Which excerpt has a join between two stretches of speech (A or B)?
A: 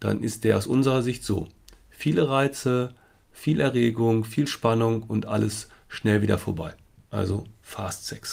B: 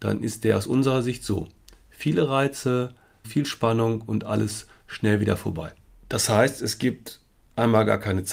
B